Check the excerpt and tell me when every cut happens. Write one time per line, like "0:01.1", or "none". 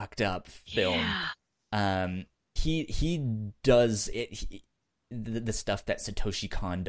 0:02.6
0:05.1